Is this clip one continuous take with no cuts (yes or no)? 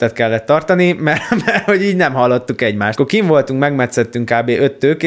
yes